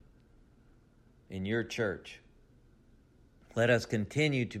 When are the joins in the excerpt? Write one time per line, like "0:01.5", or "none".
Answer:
0:03.4

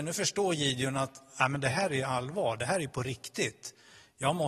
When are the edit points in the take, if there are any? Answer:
none

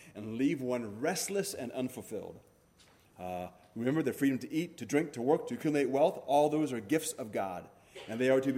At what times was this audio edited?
0:03.1

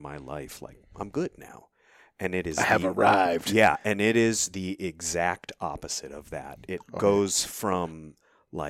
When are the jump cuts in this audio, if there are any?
none

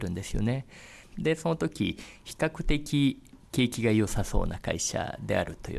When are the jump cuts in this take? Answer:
0:01.1

